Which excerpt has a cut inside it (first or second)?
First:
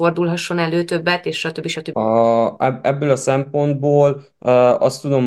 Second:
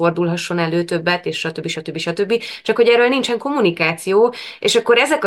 first